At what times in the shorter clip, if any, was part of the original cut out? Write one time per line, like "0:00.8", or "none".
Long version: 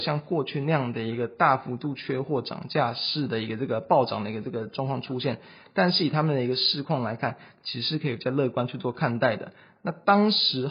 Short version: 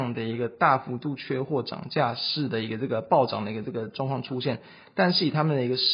none